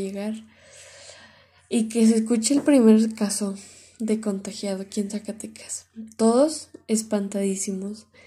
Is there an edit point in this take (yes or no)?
no